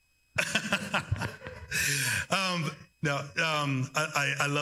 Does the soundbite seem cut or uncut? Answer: cut